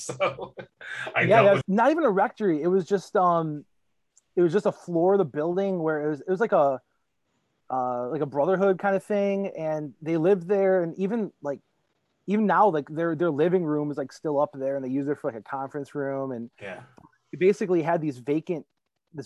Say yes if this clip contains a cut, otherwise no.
yes